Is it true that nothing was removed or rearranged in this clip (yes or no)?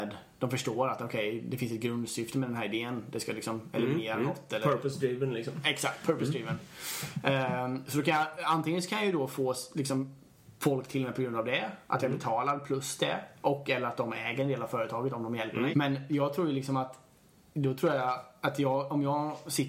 no